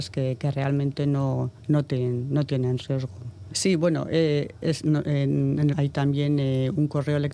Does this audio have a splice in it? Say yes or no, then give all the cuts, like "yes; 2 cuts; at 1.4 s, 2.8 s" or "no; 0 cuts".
yes; 2 cuts; at 3.5 s, 5.7 s